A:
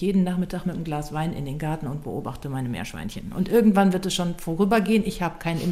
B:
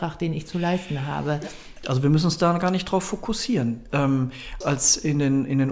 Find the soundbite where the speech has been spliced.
B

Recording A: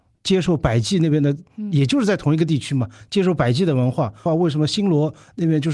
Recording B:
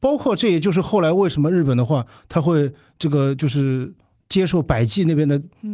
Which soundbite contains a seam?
A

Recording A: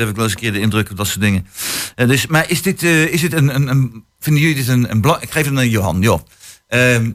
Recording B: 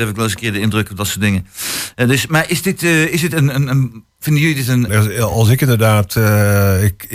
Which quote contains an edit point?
B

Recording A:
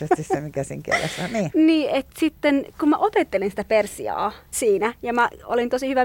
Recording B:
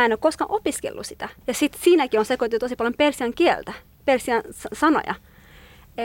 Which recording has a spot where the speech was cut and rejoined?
A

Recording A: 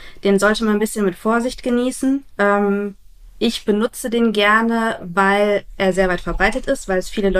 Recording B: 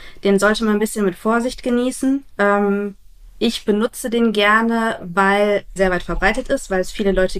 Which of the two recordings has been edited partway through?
B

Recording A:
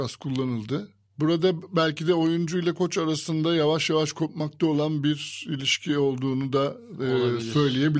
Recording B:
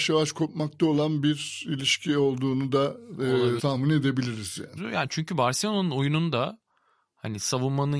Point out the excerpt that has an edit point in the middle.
B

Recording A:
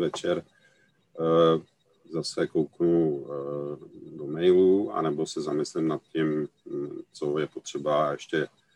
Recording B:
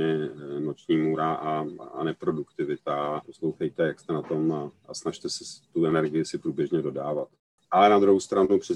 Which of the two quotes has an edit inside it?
B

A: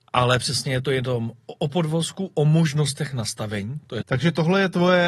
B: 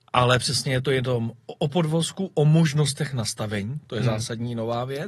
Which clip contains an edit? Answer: A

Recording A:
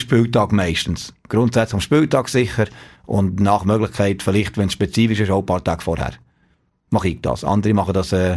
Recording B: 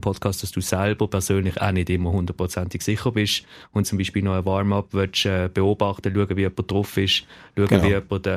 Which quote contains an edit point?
B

